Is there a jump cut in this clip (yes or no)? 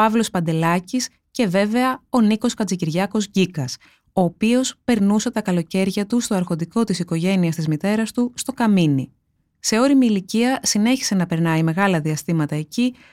no